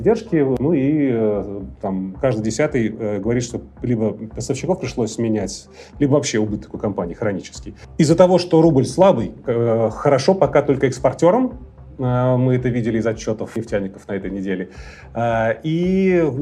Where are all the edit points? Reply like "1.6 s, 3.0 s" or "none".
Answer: 9.4 s

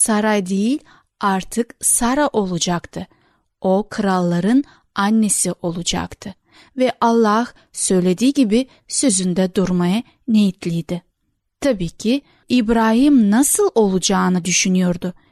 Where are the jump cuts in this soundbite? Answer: none

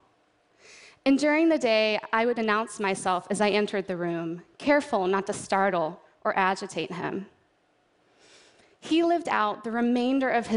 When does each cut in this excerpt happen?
none

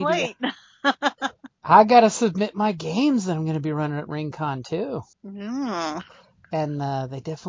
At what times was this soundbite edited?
5.1 s

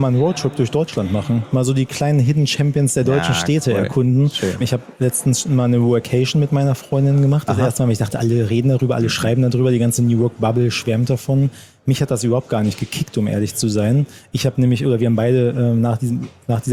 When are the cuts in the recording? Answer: 4.6 s

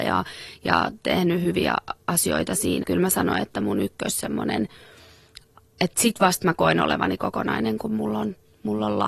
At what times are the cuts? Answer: 2.8 s

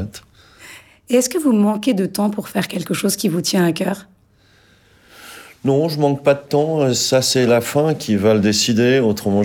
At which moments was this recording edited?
none

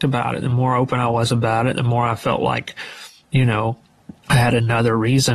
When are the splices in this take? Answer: 1.7 s

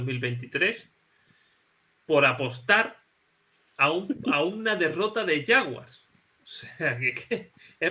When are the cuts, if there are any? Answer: none

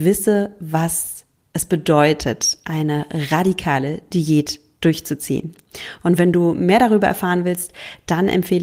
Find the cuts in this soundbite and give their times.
none

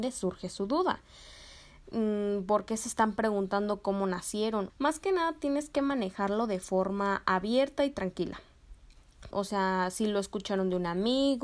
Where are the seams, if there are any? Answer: 4.7 s, 9.3 s

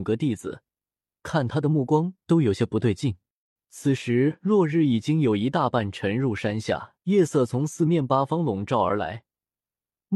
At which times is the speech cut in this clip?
3.6 s, 7.0 s

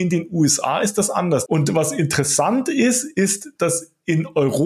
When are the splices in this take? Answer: 1.5 s

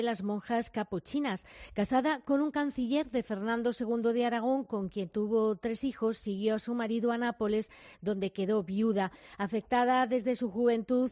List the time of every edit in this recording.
none

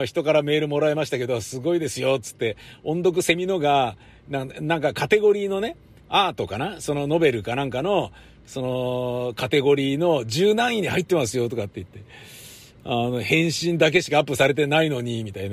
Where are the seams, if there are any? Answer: none

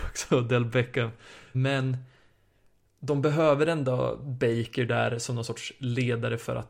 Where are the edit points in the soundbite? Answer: 1.5 s

